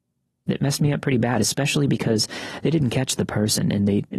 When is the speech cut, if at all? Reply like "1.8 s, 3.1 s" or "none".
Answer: none